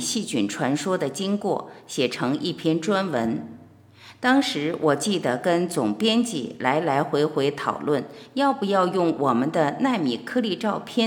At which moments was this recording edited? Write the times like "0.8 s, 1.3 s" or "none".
none